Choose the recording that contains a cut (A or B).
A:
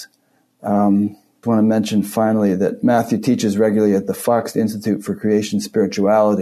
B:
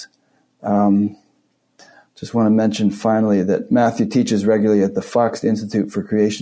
A